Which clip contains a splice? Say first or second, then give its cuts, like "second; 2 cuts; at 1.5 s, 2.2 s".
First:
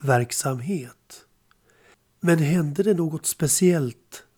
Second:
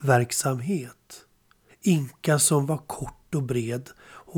second; 1 cut; at 1.7 s